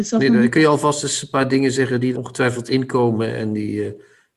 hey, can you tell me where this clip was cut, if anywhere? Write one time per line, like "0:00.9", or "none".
0:02.1

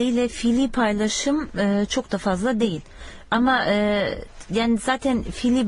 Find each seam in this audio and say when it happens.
none

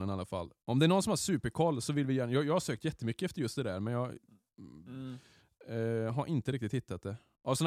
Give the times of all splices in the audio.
none

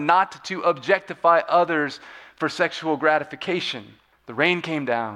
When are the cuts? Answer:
0:04.1

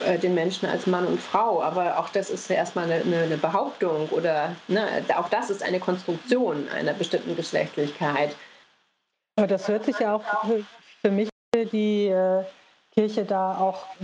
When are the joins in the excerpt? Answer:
none

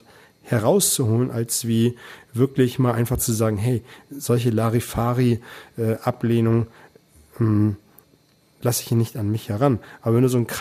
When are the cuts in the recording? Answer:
none

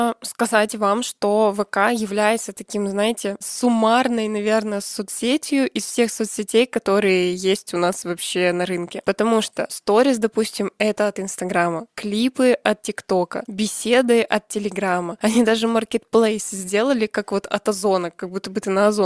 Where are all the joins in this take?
none

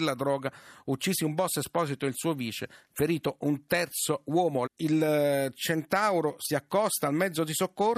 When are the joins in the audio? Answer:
0:04.7

